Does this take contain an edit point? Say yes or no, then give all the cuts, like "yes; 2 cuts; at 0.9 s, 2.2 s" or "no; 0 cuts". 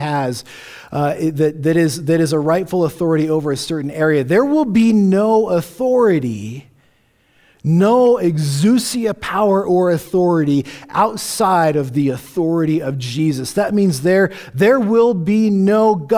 no; 0 cuts